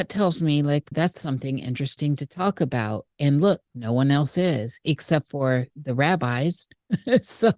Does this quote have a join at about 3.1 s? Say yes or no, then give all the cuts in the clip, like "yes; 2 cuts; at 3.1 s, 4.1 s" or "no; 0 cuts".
no; 1 cut; at 0.9 s